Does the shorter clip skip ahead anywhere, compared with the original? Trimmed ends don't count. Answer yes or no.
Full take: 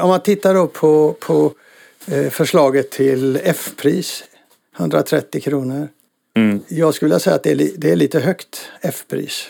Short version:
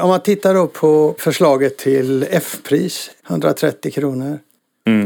yes